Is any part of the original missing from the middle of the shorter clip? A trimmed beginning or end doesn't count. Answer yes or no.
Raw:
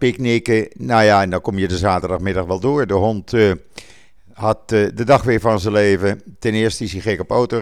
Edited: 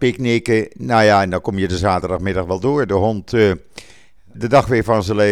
yes